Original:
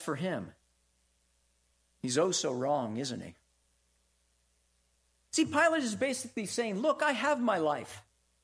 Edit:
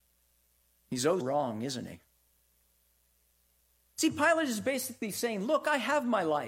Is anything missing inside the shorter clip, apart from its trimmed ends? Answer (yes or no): yes